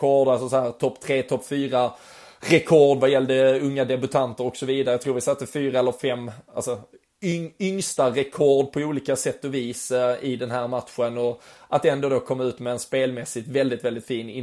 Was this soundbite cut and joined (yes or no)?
no